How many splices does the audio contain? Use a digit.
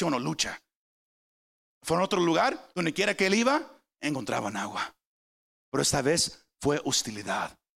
1